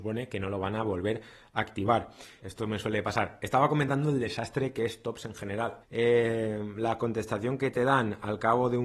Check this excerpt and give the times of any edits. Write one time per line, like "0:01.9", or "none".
0:02.4
0:05.8